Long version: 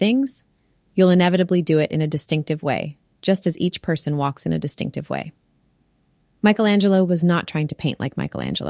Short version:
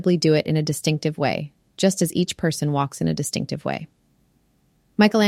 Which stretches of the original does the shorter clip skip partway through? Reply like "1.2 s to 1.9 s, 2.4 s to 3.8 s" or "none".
none